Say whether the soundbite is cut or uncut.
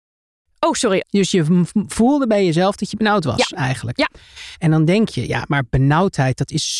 cut